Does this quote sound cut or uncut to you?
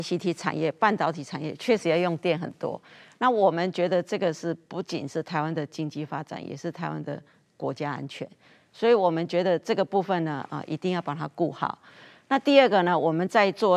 uncut